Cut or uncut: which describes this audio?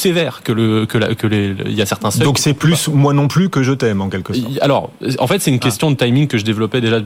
uncut